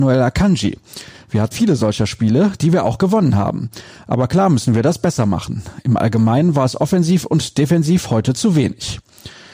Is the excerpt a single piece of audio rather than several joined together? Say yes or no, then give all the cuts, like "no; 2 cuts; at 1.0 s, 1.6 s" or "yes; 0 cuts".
no; 1 cut; at 1.5 s